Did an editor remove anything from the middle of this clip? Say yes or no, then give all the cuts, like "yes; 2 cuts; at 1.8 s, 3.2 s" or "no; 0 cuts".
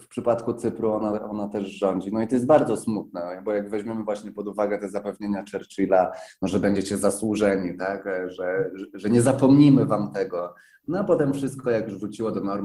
no; 0 cuts